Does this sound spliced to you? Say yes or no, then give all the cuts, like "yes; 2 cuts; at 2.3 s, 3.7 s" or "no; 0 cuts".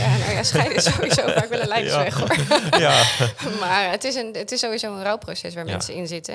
no; 0 cuts